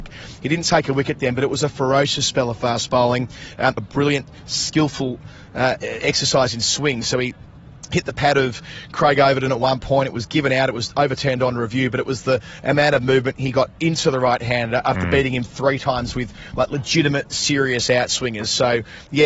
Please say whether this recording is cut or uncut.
cut